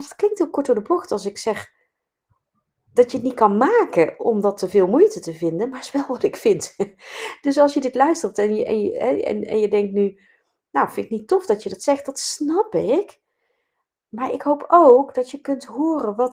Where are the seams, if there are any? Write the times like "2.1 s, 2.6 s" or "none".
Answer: none